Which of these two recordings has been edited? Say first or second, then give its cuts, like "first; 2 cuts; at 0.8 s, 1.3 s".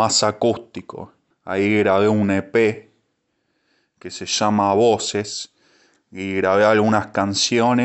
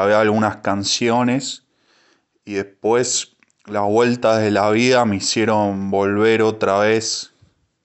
first; 1 cut; at 1.3 s